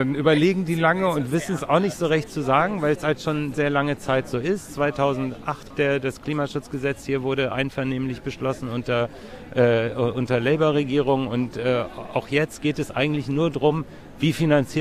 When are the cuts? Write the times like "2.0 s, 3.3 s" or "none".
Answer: 3.5 s, 5.7 s